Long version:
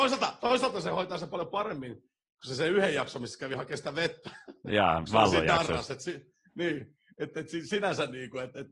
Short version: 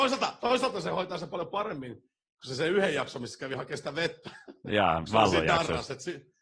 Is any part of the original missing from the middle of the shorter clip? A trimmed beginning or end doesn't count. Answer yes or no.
no